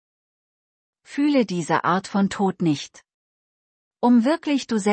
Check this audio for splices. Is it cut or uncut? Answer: cut